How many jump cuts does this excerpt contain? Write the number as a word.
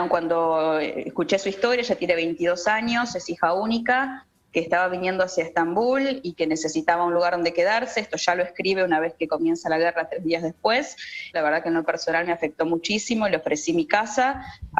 one